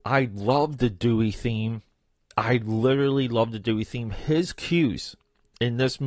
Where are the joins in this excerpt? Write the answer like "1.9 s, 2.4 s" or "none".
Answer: none